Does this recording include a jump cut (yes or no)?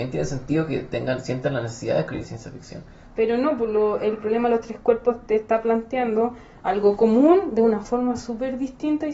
yes